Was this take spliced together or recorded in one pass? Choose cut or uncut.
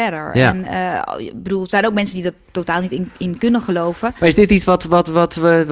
uncut